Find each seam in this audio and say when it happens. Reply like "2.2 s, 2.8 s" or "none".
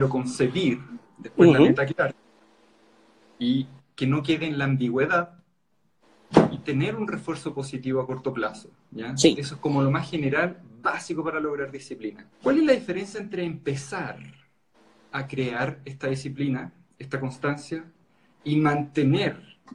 12.3 s